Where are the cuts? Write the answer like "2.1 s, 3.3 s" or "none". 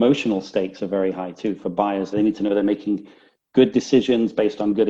2.1 s